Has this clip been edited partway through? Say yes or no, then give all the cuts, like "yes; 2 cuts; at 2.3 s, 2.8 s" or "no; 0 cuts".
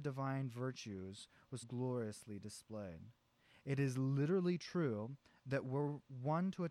yes; 1 cut; at 1.6 s